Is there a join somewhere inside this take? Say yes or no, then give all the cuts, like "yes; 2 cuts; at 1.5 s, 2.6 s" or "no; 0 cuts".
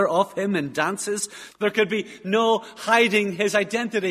yes; 1 cut; at 1.5 s